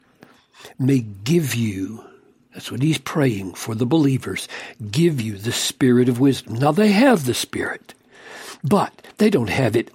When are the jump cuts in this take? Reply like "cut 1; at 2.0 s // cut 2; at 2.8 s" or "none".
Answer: none